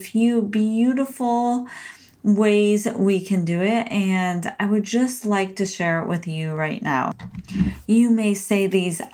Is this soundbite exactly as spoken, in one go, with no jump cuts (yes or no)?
yes